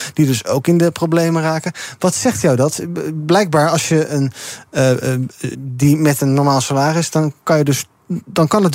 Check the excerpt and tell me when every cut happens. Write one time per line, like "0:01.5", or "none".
0:05.5